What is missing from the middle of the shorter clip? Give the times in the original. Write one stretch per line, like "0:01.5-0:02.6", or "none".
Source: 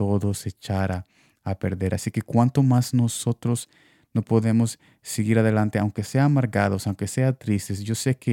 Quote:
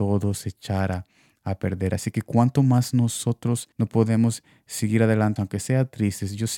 0:03.7-0:04.1
0:05.7-0:06.8